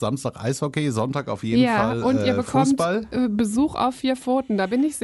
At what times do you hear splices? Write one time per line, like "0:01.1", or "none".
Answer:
none